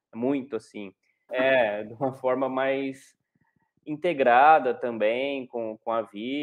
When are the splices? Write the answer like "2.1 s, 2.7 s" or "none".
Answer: 1.3 s